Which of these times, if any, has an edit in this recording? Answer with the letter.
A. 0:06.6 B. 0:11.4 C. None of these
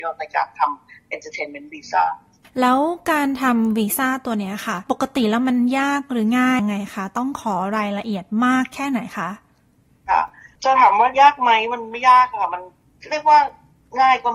A